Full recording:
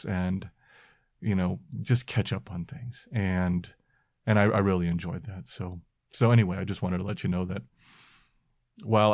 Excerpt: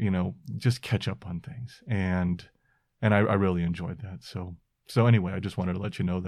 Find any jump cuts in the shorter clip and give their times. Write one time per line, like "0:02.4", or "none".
none